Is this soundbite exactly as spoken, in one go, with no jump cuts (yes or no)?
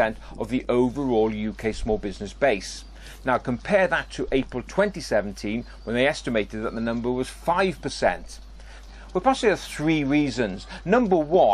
no